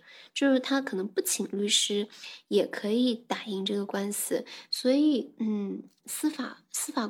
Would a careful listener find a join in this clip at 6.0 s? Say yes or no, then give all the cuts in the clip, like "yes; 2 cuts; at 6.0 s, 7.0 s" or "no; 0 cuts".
yes; 2 cuts; at 4.7 s, 6.0 s